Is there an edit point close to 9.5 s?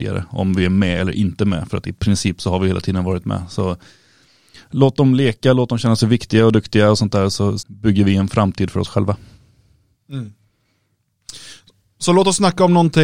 no; 1 cut; at 7.6 s

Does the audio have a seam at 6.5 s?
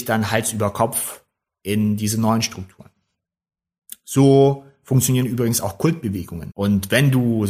yes; 1 cut; at 6.5 s

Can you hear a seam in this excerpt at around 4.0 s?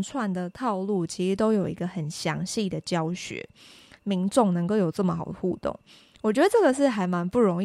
yes; 1 cut; at 4.0 s

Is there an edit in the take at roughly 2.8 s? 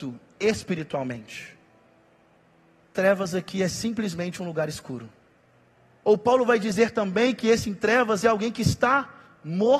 yes; 2 cuts; at 2.8 s, 6.0 s

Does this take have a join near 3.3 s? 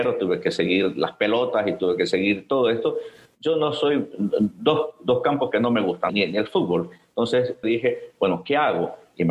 no; 2 cuts; at 6.1 s, 7.6 s

